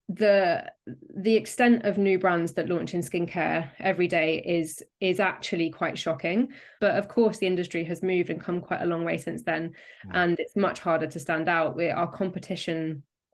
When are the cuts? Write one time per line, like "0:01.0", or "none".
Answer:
0:06.8